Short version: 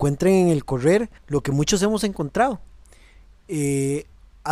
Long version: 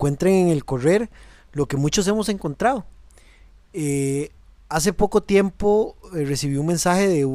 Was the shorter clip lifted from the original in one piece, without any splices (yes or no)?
no